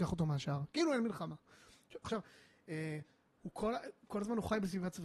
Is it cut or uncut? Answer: cut